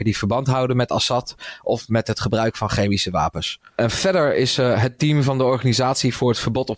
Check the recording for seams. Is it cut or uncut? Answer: uncut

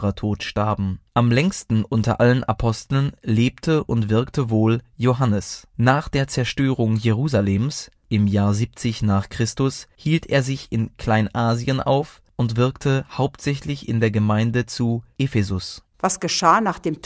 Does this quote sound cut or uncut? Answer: uncut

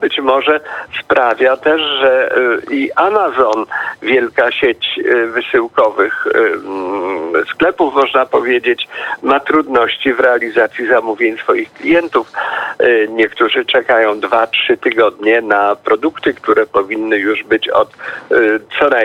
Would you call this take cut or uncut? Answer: uncut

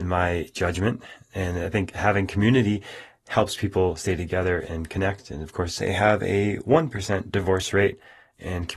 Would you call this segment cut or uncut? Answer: cut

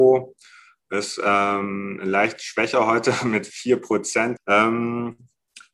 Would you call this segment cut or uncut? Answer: cut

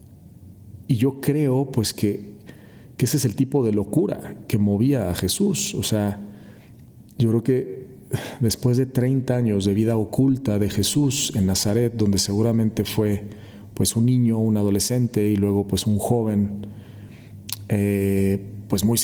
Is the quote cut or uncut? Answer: uncut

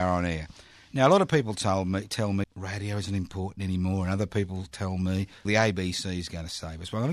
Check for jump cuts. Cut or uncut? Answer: cut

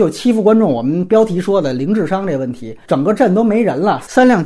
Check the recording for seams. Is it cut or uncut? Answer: uncut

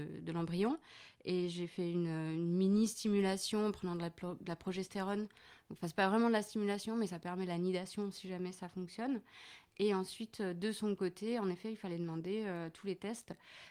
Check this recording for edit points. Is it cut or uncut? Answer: uncut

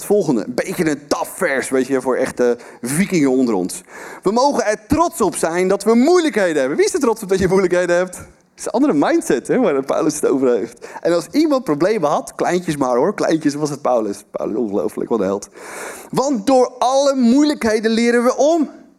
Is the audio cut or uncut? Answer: uncut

